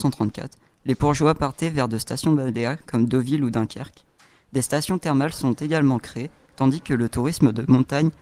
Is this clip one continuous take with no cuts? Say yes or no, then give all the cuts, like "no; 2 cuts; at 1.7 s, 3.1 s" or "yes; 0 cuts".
yes; 0 cuts